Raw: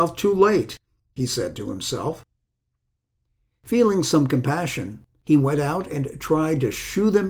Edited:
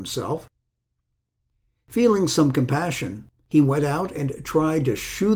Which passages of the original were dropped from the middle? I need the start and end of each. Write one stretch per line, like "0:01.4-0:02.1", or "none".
none

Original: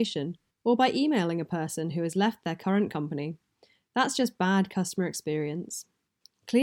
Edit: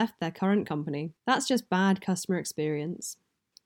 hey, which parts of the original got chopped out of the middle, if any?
0:03.4-0:03.9

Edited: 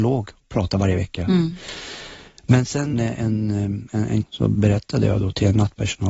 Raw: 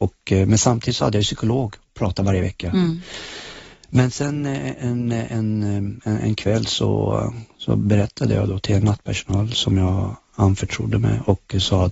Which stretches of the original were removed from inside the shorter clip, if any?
0:04.4-0:05.1
0:06.4-0:07.5

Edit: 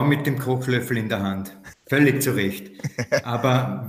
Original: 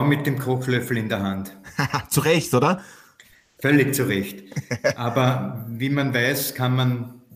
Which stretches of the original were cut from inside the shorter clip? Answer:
0:01.7-0:03.5

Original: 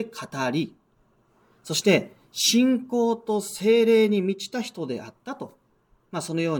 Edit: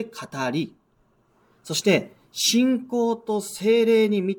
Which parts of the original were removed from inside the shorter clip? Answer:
none

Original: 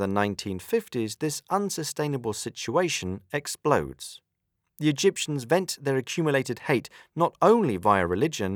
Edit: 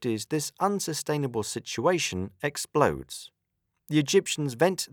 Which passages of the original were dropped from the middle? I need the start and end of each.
none

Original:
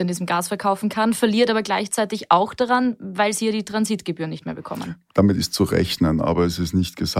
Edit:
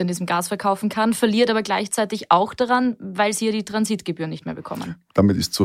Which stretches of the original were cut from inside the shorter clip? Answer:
none

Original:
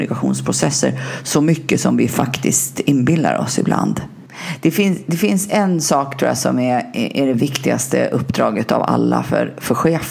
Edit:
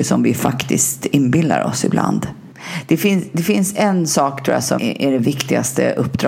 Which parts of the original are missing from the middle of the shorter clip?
0:06.5-0:06.9

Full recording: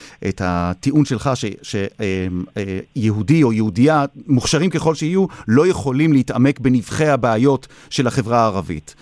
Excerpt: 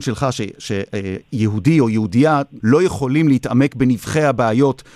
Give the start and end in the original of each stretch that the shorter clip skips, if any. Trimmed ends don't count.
0:01.9-0:02.5
0:04.2-0:05.4

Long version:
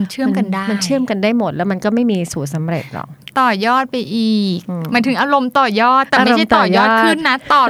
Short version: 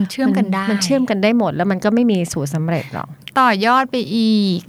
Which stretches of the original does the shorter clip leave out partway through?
none

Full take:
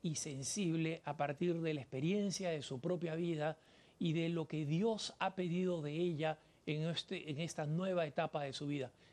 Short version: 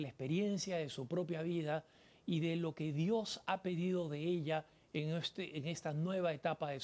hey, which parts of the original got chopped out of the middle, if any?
none

